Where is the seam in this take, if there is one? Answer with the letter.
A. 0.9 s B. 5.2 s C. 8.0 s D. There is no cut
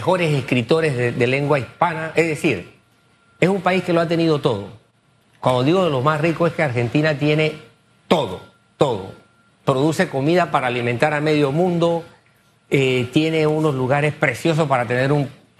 B